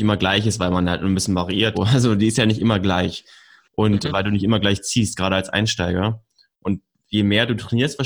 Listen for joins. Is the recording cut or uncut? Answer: cut